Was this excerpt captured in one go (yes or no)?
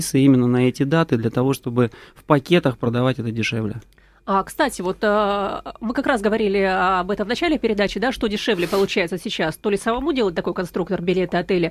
yes